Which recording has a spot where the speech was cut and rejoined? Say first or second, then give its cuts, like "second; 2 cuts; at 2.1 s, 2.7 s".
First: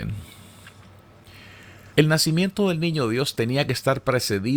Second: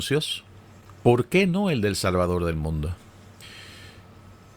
first; 1 cut; at 1.9 s